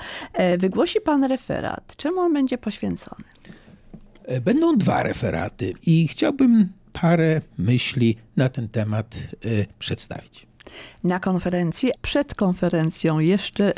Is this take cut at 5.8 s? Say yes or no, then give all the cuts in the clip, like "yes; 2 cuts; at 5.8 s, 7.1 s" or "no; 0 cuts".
yes; 2 cuts; at 5.8 s, 12.0 s